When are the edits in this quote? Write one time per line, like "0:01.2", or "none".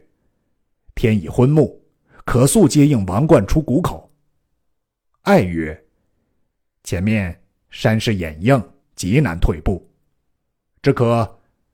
0:08.8